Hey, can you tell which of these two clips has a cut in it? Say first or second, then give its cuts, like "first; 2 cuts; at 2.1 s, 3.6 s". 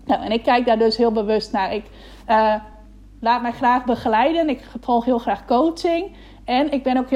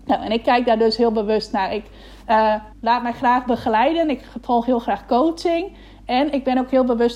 second; 1 cut; at 2.7 s